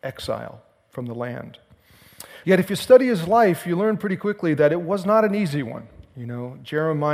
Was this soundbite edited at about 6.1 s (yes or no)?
no